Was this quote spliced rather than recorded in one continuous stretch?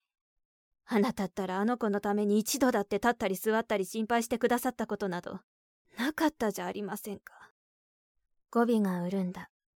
no; 0 cuts

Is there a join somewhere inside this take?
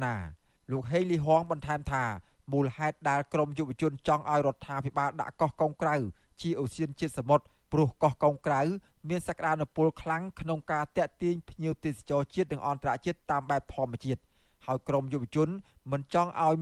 no; 0 cuts

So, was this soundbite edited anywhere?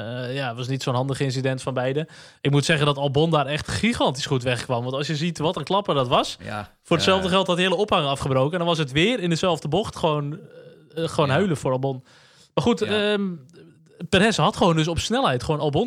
no; 0 cuts

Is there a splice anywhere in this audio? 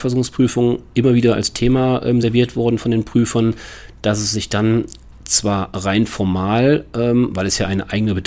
no; 0 cuts

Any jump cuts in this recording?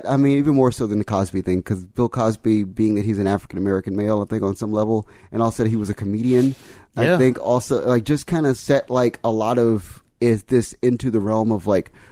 no; 0 cuts

